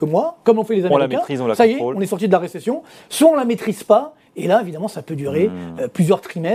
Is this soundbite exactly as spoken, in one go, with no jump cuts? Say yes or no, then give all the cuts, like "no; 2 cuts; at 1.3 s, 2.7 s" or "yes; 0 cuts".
yes; 0 cuts